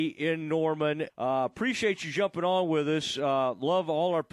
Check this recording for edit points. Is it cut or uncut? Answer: cut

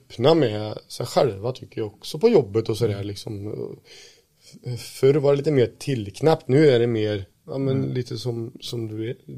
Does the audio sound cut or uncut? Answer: uncut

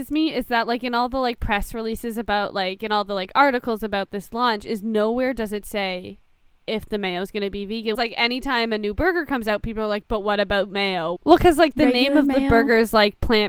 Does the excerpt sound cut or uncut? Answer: cut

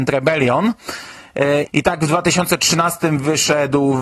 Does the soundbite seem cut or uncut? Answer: cut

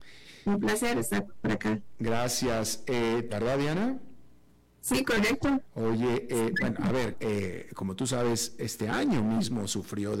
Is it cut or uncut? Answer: cut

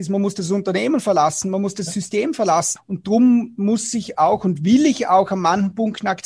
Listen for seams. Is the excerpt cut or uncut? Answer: cut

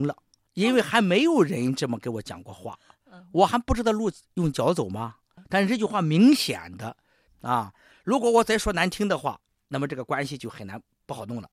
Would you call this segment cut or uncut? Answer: cut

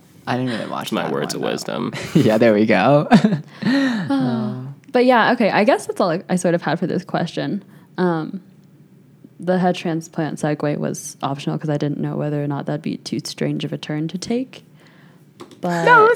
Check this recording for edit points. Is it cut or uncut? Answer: uncut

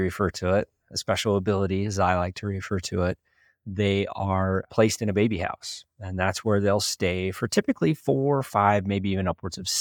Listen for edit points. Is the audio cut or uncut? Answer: uncut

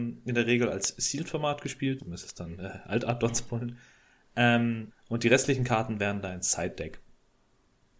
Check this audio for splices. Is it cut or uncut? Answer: cut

